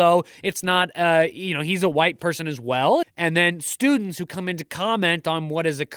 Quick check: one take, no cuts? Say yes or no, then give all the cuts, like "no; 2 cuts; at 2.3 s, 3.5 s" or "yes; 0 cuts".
no; 1 cut; at 3.0 s